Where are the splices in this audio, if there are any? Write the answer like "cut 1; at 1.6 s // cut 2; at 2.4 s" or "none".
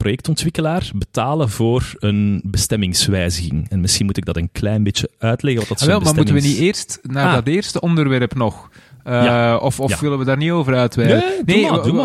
none